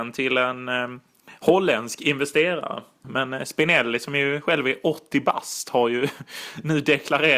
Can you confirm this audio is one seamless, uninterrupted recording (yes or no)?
no